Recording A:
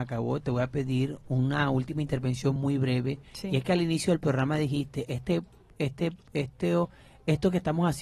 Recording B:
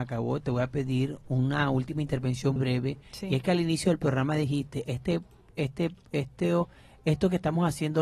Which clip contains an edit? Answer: B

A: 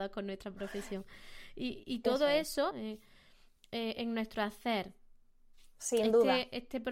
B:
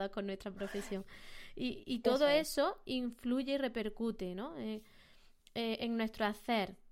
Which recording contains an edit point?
A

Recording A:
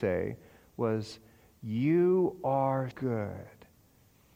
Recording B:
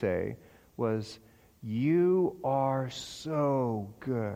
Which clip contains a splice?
A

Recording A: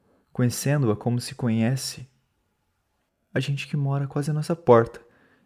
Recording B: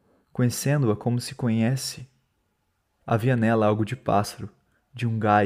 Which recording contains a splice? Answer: B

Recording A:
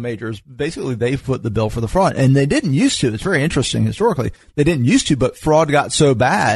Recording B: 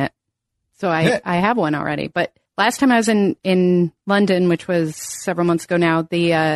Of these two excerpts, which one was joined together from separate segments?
B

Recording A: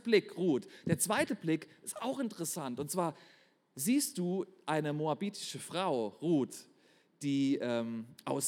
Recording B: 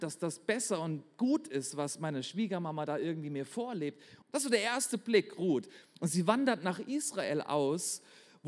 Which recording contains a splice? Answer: B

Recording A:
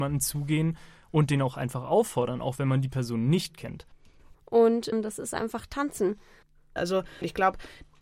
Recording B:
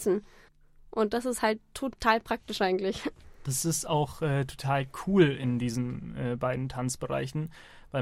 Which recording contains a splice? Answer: A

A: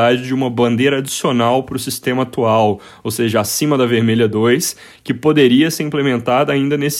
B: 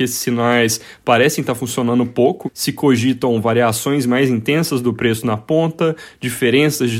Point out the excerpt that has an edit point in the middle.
B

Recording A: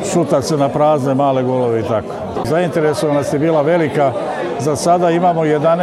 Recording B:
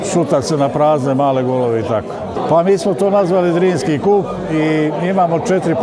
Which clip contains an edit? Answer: A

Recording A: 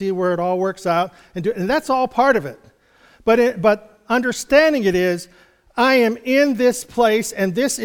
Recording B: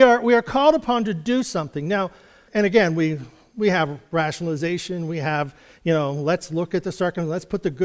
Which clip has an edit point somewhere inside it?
B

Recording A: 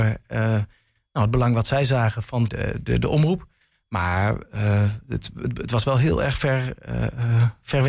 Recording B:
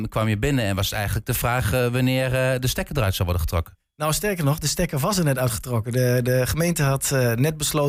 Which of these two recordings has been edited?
A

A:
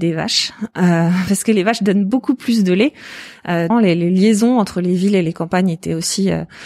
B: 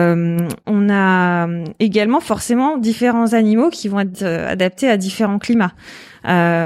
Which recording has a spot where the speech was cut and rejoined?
A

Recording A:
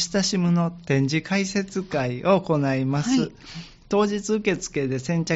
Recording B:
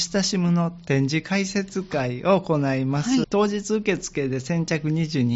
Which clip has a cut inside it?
B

